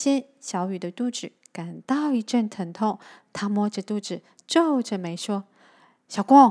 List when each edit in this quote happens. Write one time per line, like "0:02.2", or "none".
none